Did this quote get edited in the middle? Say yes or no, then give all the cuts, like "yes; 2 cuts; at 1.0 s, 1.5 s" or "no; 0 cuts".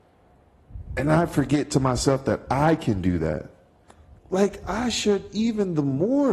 yes; 1 cut; at 4.2 s